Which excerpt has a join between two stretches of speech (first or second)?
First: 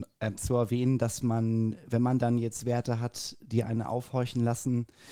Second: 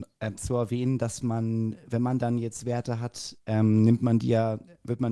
second